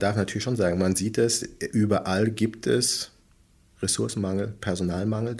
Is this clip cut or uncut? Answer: uncut